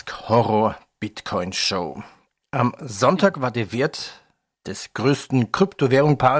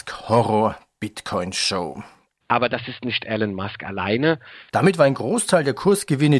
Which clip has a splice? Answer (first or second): second